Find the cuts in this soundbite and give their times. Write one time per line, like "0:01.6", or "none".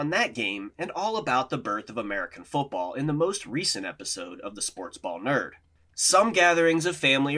0:05.8